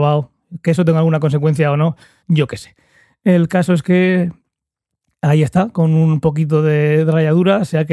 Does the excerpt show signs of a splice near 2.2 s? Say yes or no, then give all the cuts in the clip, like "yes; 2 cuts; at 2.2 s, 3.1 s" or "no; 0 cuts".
yes; 1 cut; at 2.2 s